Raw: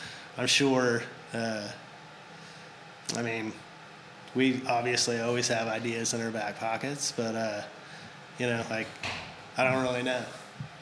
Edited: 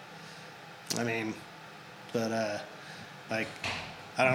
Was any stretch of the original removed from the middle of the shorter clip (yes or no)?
yes